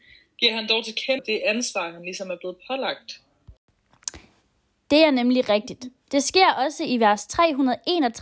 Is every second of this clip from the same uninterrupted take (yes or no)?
no